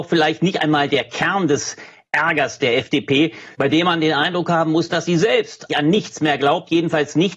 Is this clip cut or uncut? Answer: cut